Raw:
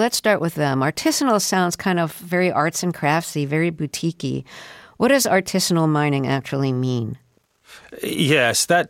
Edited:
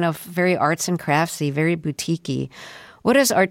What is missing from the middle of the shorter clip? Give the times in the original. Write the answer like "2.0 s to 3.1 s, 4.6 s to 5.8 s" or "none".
none